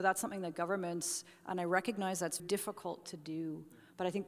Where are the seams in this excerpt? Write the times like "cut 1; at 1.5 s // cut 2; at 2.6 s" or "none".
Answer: cut 1; at 2.4 s